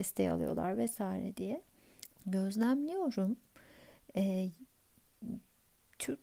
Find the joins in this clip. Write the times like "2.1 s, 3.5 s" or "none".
2.1 s